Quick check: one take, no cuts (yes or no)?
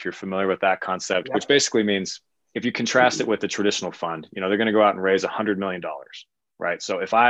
yes